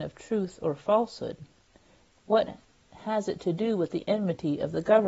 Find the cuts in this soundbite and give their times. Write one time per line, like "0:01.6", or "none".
none